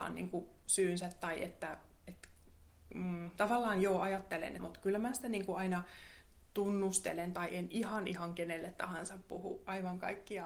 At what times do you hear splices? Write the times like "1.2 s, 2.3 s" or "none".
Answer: 4.6 s